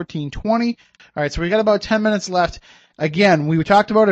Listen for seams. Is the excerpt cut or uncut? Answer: cut